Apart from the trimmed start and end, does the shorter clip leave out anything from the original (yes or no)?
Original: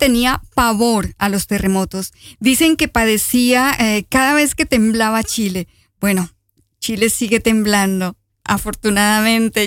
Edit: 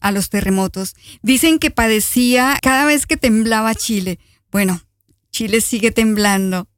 yes